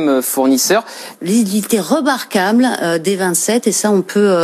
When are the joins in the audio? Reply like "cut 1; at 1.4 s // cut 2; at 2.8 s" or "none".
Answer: cut 1; at 1.1 s